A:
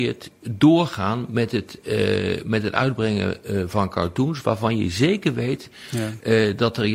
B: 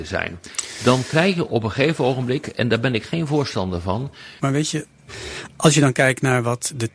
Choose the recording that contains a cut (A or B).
B